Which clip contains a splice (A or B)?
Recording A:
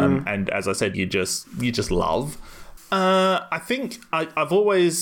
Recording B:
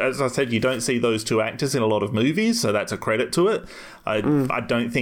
A